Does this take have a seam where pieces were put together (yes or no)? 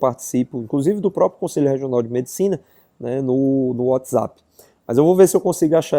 no